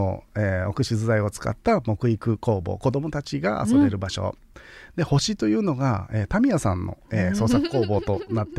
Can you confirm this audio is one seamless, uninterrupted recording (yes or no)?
no